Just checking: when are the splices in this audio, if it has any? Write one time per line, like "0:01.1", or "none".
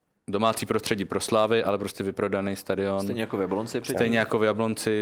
none